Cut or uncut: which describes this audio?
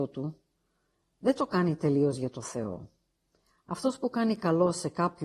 uncut